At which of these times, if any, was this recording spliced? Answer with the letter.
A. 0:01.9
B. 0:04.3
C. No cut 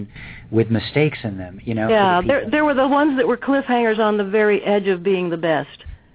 A